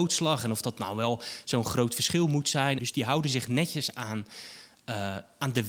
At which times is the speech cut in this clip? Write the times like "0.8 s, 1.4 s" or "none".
2.8 s